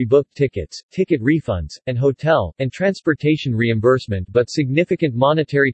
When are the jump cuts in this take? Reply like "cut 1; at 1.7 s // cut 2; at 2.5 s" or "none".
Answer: cut 1; at 2.5 s